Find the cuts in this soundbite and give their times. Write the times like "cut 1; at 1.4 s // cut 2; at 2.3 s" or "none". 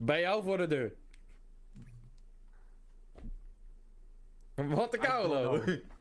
none